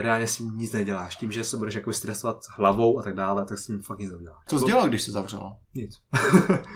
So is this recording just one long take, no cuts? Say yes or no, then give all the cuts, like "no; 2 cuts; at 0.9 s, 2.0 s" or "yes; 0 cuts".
no; 1 cut; at 5.6 s